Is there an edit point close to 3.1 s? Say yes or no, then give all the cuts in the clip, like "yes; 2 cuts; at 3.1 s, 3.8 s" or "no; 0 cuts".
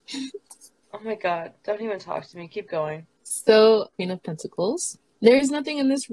yes; 1 cut; at 3.1 s